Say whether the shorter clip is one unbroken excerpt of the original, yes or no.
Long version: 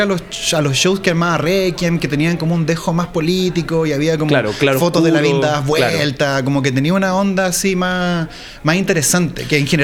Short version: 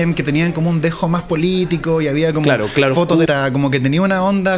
no